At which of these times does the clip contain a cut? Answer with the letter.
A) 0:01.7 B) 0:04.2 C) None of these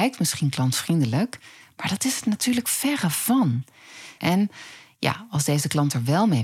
B